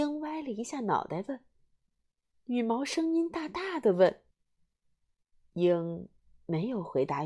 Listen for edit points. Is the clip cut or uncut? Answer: cut